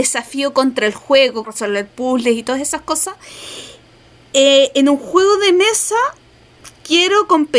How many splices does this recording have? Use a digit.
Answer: 1